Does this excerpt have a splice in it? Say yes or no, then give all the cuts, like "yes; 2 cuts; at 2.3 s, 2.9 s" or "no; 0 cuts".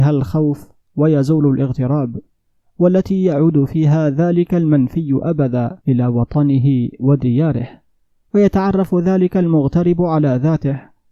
yes; 1 cut; at 5.8 s